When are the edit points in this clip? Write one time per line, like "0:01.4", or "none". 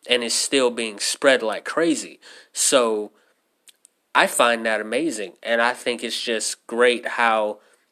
none